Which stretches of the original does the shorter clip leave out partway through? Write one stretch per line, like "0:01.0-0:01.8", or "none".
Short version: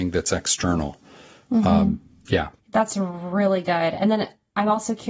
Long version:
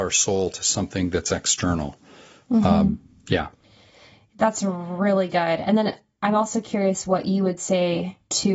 0:03.6-0:04.3